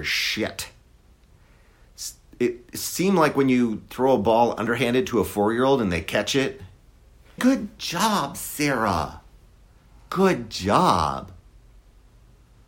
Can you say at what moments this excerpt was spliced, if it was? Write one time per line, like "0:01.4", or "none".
0:07.4